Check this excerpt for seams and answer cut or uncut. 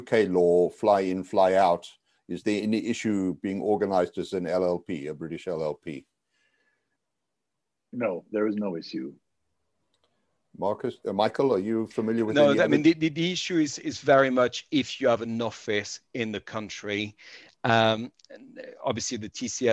uncut